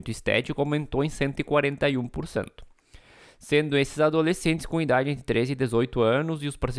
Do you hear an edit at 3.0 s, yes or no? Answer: no